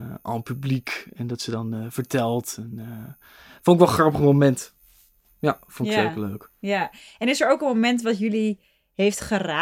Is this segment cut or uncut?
uncut